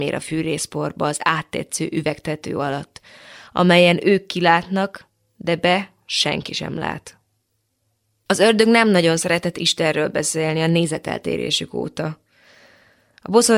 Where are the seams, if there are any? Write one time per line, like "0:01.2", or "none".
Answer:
none